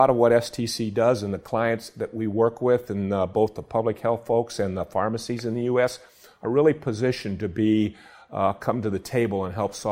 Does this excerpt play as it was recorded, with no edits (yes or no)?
yes